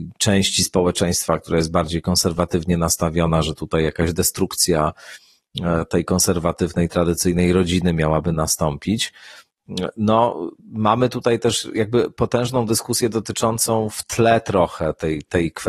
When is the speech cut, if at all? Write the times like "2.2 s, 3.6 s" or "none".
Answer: 10.6 s